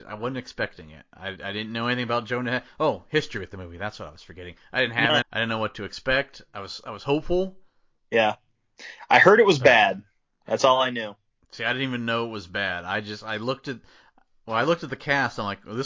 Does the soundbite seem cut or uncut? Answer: cut